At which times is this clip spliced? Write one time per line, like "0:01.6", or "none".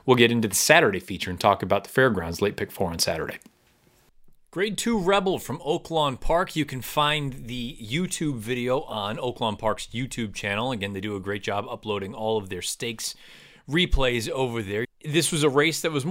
0:14.8